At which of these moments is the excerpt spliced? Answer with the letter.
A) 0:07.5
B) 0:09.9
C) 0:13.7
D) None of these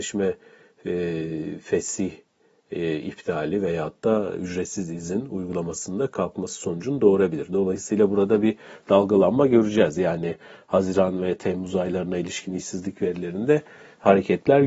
D